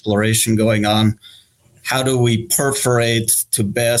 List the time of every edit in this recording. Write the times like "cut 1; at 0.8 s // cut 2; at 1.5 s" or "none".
none